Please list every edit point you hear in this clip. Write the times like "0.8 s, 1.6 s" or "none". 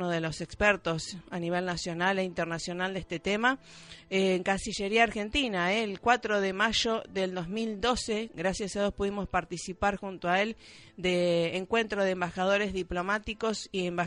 none